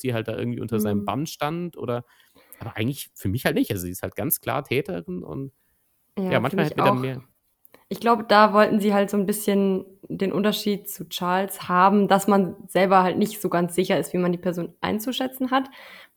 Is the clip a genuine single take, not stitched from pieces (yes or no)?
yes